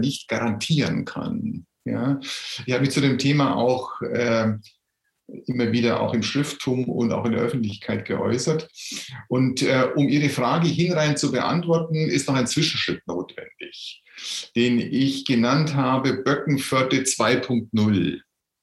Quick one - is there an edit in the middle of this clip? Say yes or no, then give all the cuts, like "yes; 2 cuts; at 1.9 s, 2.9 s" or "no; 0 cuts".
no; 0 cuts